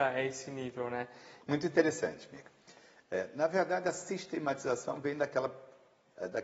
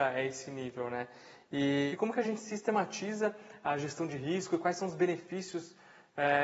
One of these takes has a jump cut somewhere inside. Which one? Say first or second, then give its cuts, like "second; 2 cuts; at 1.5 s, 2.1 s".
first; 1 cut; at 1.4 s